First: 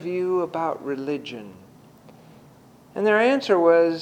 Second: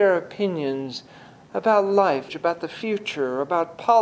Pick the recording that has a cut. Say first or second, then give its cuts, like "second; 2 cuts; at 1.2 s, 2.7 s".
second; 1 cut; at 2.3 s